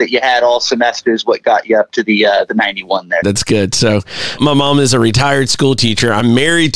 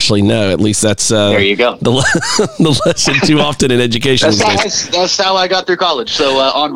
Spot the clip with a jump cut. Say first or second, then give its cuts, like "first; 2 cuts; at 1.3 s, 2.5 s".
first; 2 cuts; at 3.2 s, 4.4 s